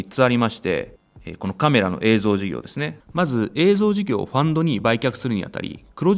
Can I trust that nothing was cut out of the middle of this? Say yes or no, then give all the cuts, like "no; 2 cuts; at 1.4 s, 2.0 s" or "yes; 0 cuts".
no; 1 cut; at 3.0 s